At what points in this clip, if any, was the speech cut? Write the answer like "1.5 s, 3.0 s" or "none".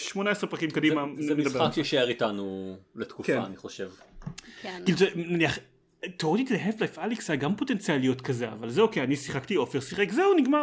1.2 s